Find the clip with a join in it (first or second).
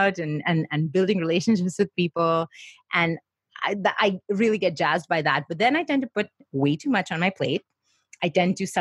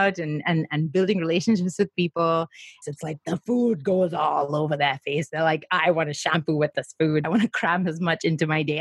second